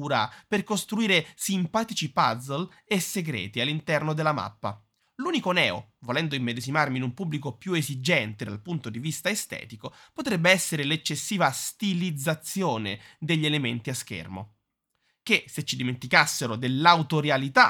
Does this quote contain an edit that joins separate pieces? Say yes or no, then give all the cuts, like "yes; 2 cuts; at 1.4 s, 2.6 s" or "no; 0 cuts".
no; 0 cuts